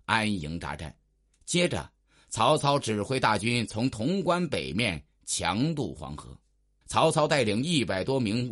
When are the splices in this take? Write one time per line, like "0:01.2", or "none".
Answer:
0:06.8